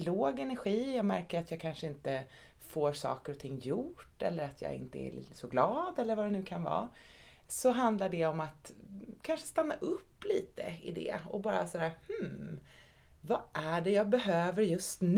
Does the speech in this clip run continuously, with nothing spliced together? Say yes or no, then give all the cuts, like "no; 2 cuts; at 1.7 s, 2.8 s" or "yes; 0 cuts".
yes; 0 cuts